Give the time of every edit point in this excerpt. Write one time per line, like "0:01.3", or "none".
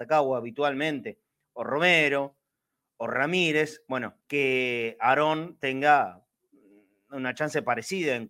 0:04.2